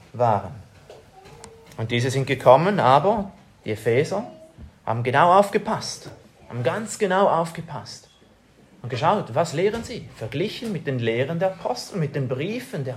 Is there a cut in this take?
no; 0 cuts

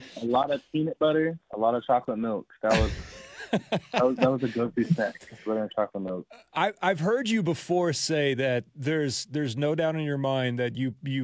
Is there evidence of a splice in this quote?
yes; 1 cut; at 1.4 s

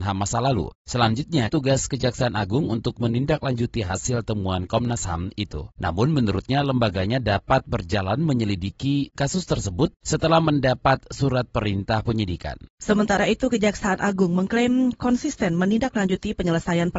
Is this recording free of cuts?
no; 2 cuts; at 1.5 s, 5.7 s

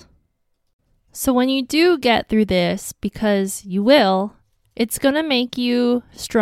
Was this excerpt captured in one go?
yes; 0 cuts

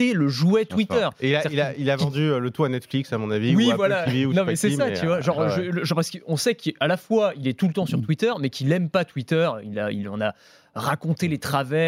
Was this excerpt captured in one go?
yes; 0 cuts

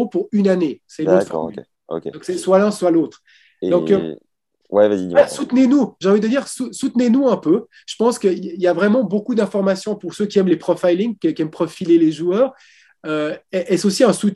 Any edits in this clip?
no; 0 cuts

